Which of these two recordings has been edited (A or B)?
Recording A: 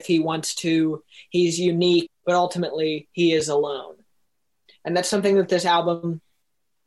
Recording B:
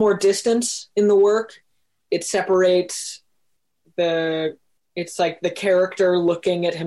A